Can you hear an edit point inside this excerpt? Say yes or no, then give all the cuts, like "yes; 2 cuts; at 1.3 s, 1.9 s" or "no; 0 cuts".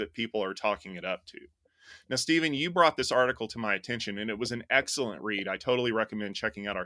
no; 0 cuts